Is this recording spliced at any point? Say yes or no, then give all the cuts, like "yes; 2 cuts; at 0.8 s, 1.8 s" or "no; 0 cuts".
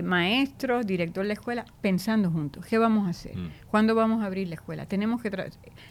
no; 0 cuts